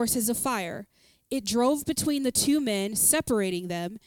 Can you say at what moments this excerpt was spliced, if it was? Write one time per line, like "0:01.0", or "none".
none